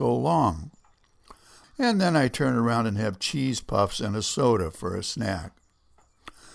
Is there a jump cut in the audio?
yes; 1 cut; at 1.6 s

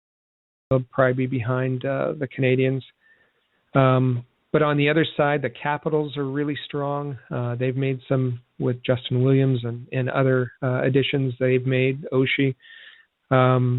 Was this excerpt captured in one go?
yes; 0 cuts

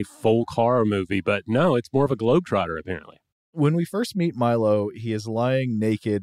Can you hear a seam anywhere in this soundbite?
yes; 1 cut; at 3.3 s

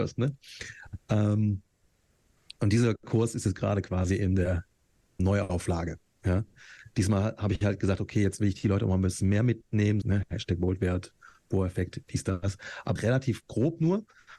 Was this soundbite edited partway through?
yes; 3 cuts; at 5.2 s, 10.0 s, 13.0 s

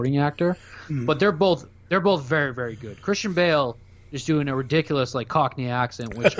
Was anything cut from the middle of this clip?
no; 0 cuts

